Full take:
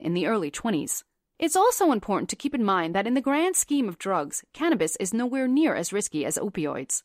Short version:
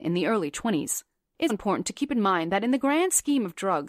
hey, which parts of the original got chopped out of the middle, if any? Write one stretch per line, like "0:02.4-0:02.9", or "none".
0:01.5-0:01.9